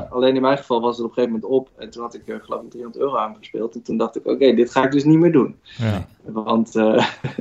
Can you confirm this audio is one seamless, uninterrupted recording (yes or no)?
yes